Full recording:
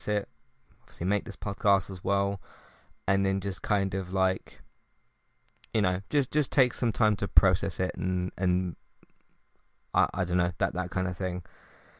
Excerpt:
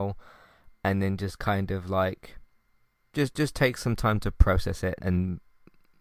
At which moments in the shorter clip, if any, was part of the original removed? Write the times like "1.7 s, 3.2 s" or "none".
3.1 s, 5.0 s